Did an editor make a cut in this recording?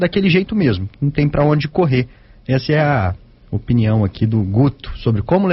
no; 0 cuts

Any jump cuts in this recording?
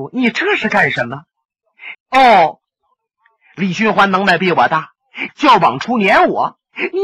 yes; 2 cuts; at 1.9 s, 5.3 s

